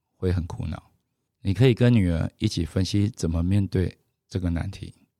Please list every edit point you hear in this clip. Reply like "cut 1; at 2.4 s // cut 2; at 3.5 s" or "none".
cut 1; at 1.3 s